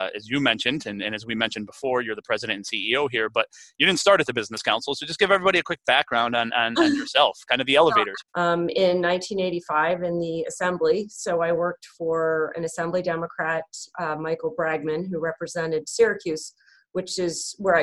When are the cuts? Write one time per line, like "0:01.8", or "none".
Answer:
0:08.2